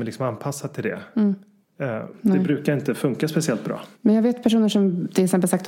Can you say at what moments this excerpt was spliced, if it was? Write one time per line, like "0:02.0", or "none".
0:02.1
0:03.9